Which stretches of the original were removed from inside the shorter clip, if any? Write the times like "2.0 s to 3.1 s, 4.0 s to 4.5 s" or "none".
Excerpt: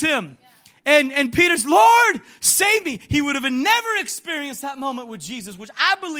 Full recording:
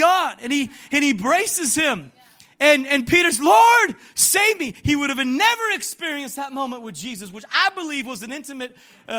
none